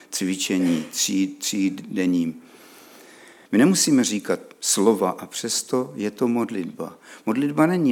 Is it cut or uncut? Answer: cut